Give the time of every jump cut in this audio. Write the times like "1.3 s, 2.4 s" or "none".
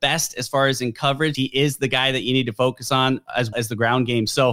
1.3 s, 3.5 s